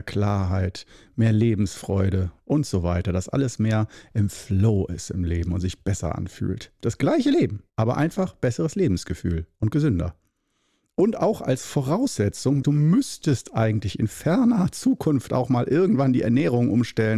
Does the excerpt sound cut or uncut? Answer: cut